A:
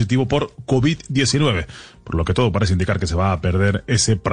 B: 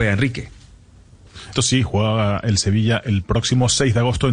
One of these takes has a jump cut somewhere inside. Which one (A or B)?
B